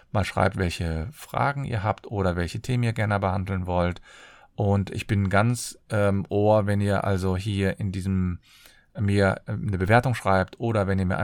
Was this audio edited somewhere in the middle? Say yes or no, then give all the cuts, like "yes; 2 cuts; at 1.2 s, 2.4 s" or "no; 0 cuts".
no; 0 cuts